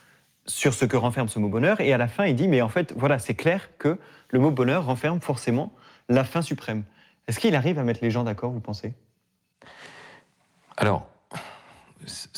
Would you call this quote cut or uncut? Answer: uncut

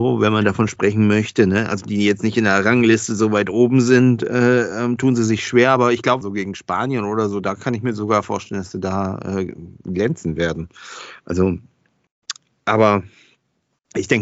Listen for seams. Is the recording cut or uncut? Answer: cut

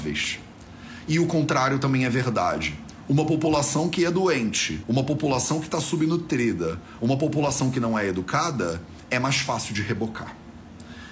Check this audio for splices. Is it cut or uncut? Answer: uncut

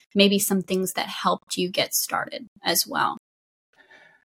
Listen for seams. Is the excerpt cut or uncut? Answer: uncut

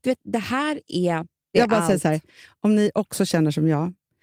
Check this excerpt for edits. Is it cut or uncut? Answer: uncut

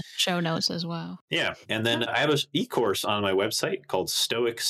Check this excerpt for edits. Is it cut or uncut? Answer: cut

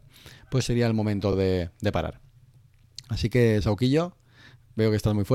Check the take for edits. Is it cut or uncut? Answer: uncut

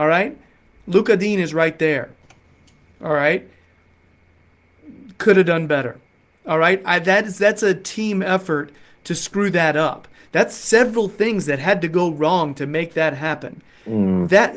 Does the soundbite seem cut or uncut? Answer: uncut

